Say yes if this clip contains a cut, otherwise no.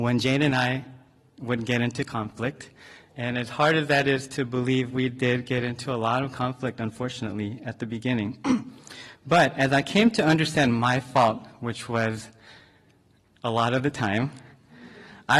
no